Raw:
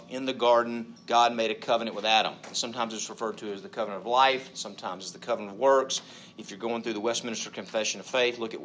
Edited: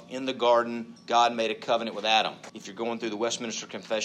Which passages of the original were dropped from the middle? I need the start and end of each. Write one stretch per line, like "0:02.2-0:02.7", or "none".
0:02.5-0:06.3